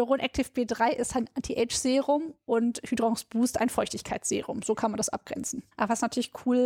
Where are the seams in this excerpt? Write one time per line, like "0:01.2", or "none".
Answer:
0:05.7